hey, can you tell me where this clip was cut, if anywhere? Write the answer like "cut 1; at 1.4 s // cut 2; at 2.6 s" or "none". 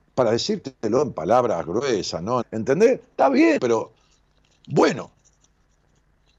cut 1; at 2.4 s // cut 2; at 3.6 s